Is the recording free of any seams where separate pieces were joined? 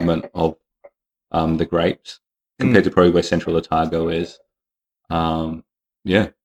yes; 0 cuts

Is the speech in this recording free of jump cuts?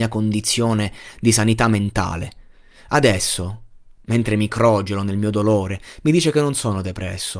yes; 0 cuts

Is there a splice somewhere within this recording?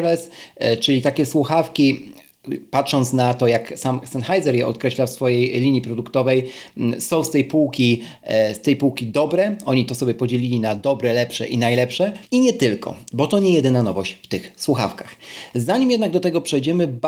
yes; 1 cut; at 12.2 s

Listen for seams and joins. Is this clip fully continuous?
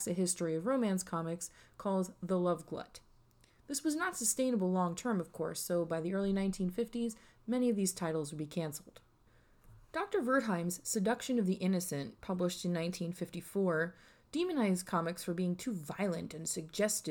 yes; 0 cuts

